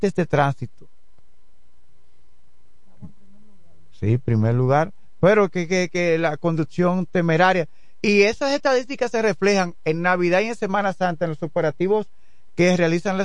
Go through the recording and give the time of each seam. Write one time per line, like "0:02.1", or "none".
none